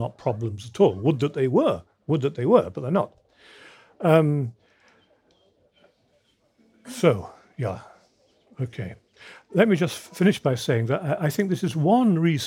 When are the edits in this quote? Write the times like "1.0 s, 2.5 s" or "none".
none